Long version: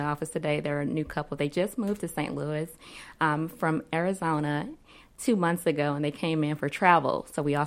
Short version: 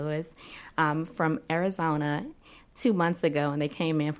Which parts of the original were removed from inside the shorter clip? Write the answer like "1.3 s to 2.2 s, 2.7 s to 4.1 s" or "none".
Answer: none